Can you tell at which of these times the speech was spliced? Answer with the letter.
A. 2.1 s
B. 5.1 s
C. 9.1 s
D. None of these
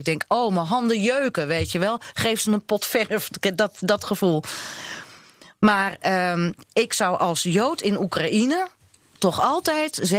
D